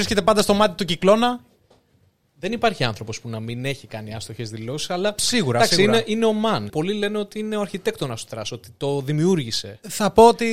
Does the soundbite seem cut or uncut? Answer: cut